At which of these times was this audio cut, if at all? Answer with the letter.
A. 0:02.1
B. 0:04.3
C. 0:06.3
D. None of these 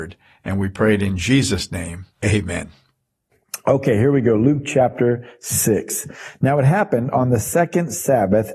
A